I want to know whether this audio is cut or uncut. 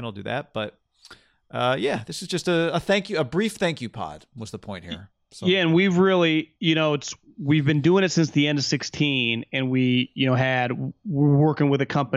uncut